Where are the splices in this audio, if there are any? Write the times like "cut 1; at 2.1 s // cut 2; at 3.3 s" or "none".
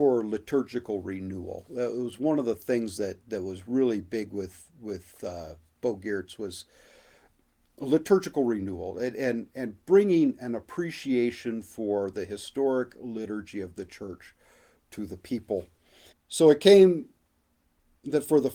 cut 1; at 16.1 s